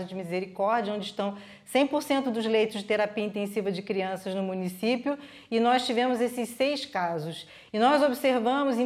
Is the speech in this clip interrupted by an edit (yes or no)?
no